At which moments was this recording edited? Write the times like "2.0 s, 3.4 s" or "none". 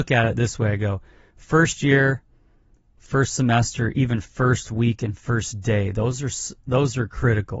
none